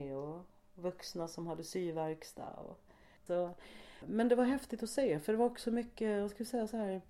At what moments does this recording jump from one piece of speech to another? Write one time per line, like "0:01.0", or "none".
0:03.3